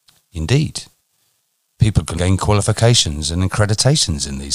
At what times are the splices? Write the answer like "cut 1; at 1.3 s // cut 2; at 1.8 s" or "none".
cut 1; at 2.2 s